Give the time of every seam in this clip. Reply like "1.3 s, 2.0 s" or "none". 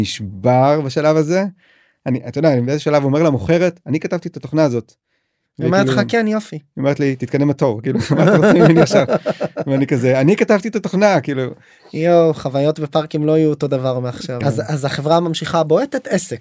14.4 s